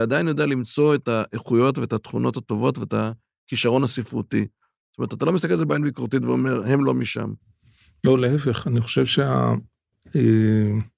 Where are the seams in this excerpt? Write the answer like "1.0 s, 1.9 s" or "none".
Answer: none